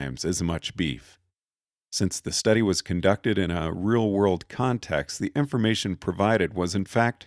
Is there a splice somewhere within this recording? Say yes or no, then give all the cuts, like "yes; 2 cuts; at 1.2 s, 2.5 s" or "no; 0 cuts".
no; 0 cuts